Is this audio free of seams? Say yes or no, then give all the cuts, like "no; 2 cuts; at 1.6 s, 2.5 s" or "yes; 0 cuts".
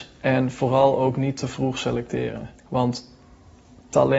no; 1 cut; at 2.6 s